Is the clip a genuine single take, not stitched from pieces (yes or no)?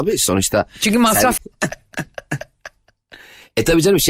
no